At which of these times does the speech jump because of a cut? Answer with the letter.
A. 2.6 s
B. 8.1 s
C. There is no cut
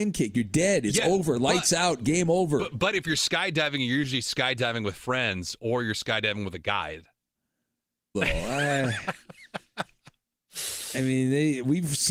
B